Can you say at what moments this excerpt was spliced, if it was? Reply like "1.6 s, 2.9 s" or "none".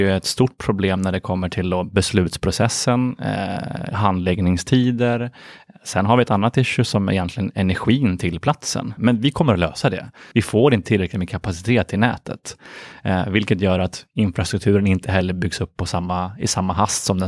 9.0 s, 10.3 s